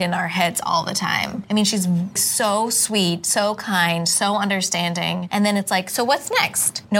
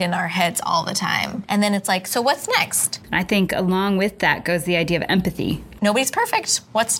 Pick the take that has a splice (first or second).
second